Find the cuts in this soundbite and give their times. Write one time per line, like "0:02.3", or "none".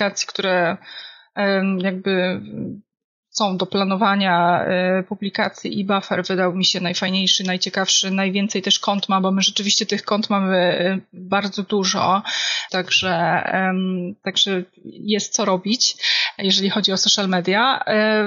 0:12.7